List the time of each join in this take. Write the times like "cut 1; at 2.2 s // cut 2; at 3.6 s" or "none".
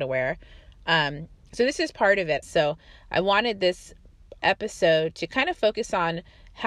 cut 1; at 2.4 s // cut 2; at 4.4 s